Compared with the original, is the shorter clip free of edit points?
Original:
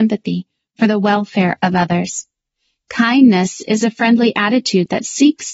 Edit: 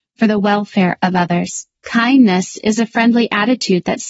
no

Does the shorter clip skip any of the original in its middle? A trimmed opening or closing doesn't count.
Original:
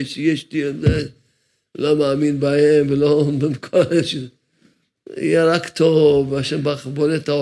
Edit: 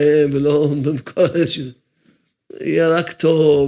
no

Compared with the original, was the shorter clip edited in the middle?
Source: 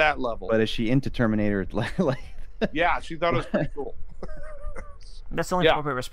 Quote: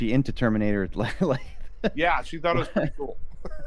no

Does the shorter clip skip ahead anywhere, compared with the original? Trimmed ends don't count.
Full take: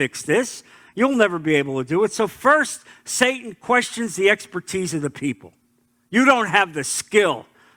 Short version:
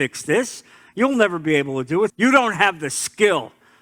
yes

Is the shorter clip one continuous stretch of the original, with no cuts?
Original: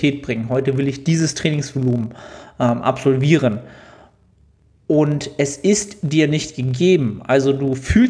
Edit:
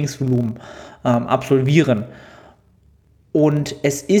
yes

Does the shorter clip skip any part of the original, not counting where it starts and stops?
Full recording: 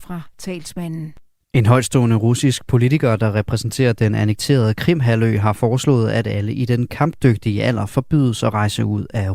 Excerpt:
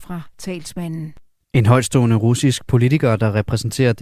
no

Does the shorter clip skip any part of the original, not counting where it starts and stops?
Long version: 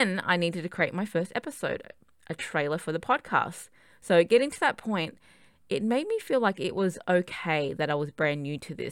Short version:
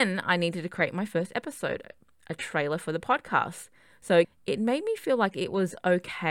yes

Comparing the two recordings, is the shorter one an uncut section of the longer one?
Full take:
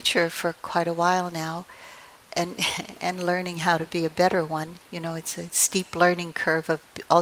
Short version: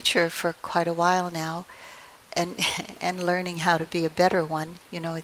yes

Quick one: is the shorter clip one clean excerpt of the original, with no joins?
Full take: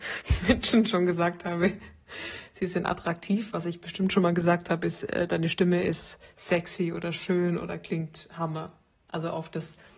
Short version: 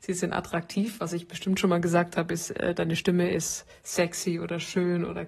yes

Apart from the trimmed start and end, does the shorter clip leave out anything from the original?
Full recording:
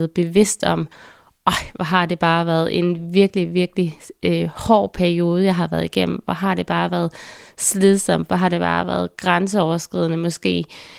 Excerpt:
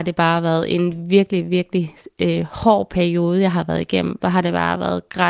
yes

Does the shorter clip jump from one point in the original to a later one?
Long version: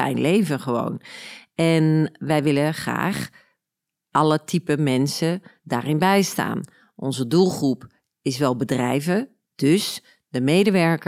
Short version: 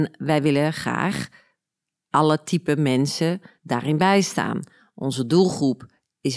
no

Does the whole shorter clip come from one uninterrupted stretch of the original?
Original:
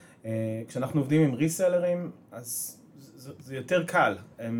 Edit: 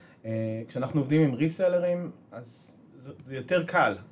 no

